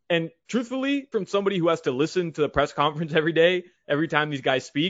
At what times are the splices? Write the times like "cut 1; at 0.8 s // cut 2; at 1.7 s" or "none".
cut 1; at 1.1 s